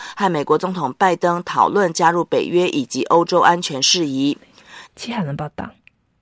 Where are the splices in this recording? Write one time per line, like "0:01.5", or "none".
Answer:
0:04.9